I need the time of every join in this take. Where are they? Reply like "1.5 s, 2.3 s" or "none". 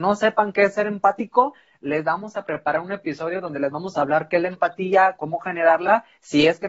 5.2 s